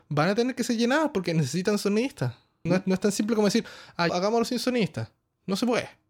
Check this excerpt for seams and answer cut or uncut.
cut